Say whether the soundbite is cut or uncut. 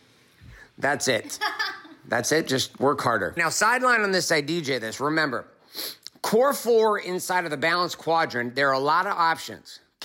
cut